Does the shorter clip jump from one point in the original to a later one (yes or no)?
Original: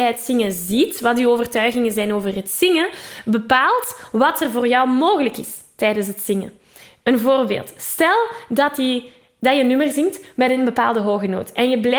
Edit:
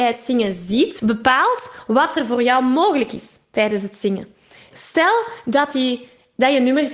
yes